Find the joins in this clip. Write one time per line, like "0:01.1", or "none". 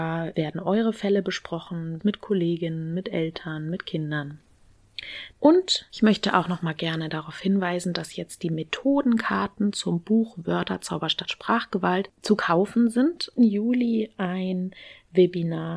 0:02.0
0:05.3
0:13.4